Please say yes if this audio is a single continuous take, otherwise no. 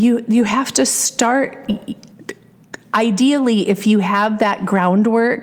yes